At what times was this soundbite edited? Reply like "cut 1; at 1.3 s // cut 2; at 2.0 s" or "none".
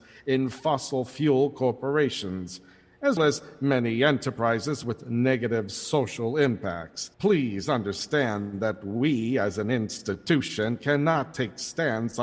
cut 1; at 3.2 s // cut 2; at 7.1 s